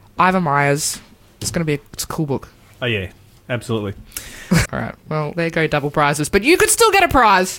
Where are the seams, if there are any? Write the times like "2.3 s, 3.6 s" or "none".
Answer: 4.6 s

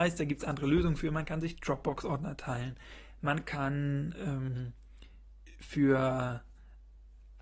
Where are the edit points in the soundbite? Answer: none

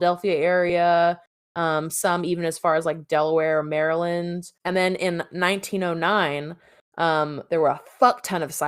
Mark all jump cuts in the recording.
4.6 s

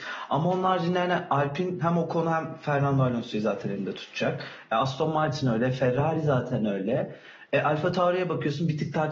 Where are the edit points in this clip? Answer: none

